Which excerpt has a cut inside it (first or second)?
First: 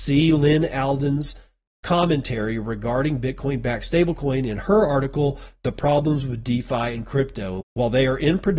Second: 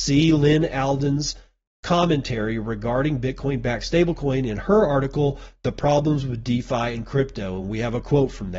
first